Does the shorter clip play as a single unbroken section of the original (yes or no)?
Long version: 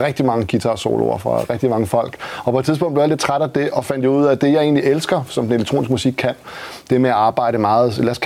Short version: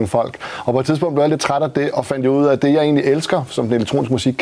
yes